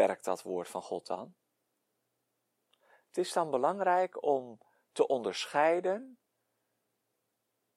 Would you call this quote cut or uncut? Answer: uncut